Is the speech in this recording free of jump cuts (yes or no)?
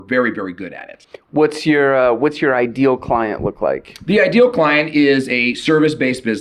yes